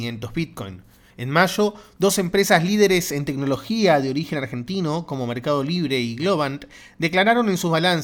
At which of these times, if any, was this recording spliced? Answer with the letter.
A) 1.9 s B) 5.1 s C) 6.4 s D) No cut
D